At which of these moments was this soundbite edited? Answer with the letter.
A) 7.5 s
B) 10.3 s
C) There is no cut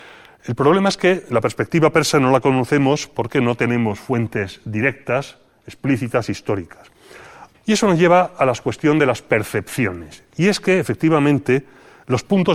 A